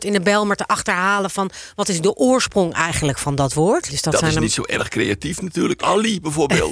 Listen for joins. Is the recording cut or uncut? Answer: cut